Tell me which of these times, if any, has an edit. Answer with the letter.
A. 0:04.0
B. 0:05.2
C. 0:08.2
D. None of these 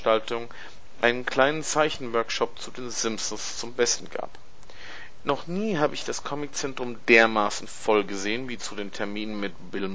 B